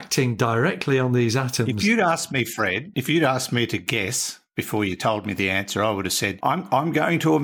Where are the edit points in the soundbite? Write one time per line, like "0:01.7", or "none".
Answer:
none

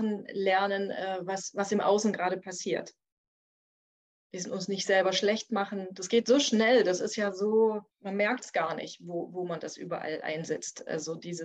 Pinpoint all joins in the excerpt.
0:07.9

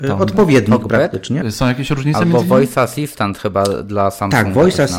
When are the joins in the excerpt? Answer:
0:01.4

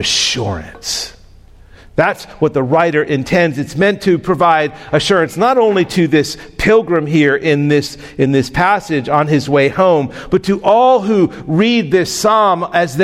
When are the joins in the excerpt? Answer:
none

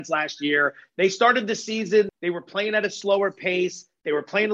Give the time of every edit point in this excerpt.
0:00.9
0:02.1

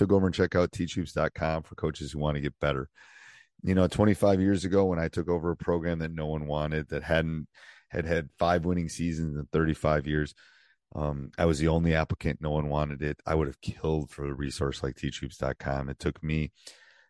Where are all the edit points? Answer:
none

